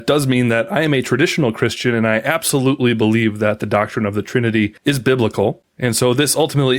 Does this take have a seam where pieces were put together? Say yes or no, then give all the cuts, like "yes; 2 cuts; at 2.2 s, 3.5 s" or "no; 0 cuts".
no; 0 cuts